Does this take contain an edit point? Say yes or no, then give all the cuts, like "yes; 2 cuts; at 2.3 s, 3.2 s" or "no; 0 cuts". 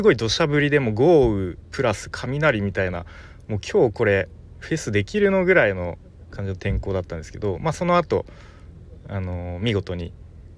no; 0 cuts